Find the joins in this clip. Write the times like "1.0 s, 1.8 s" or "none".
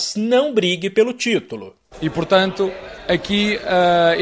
1.9 s